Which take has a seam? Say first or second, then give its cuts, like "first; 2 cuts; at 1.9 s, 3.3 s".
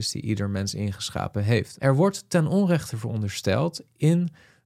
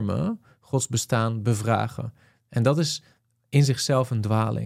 first; 1 cut; at 1.8 s